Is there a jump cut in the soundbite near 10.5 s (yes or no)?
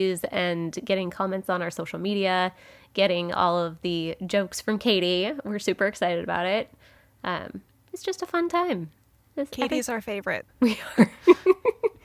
yes